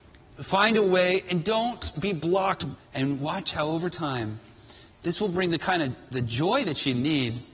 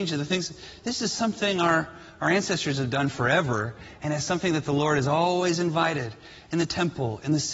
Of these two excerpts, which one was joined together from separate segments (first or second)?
first